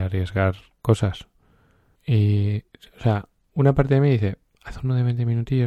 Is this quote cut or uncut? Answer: cut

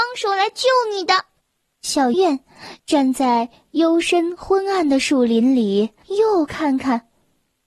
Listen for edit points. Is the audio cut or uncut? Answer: cut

